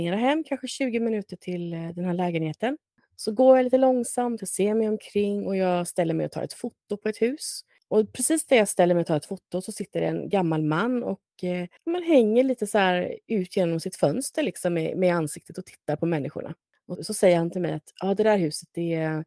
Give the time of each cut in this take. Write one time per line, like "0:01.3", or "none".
0:17.0

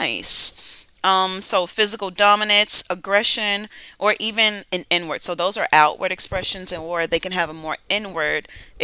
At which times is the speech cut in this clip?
none

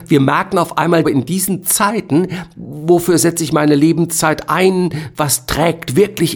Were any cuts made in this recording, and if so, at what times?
0:01.0
0:02.6

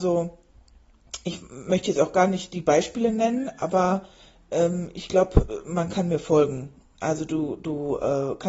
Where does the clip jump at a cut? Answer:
none

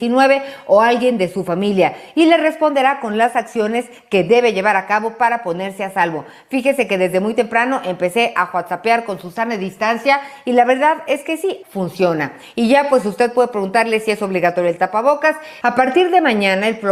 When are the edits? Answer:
0:11.6
0:15.6

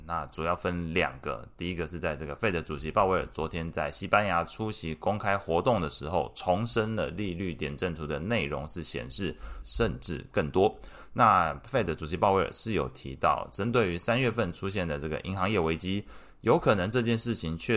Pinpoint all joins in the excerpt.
0:09.6

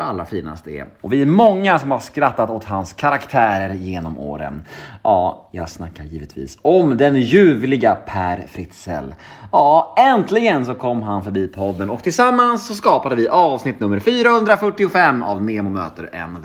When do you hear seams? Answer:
0:01.0

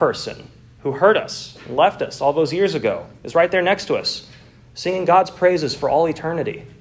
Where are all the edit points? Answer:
none

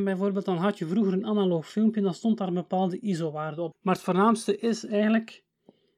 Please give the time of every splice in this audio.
0:03.7

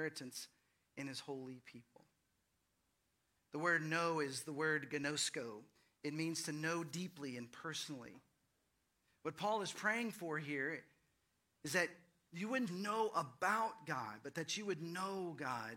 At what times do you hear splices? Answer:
0:12.7

